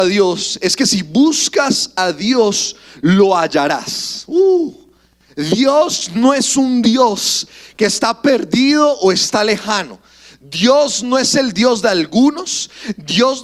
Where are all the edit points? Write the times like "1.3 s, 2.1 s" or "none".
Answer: none